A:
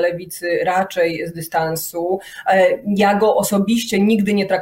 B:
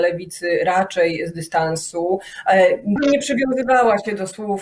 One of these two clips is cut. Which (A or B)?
B